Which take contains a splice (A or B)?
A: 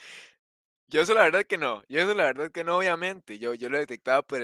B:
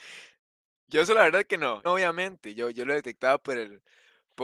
B